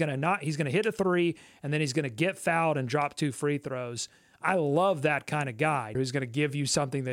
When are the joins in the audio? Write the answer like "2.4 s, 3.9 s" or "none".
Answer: 5.9 s

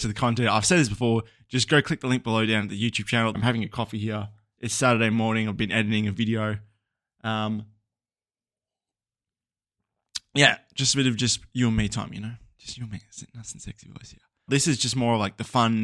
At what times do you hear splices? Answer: 3.3 s, 14.5 s

